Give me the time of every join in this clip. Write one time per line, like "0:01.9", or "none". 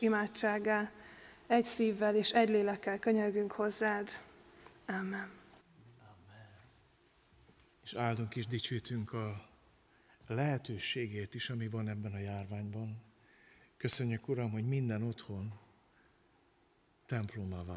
0:04.7